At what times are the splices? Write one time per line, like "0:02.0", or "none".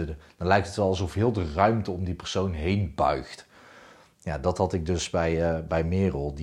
none